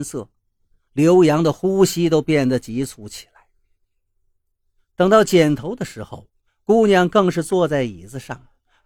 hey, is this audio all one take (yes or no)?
yes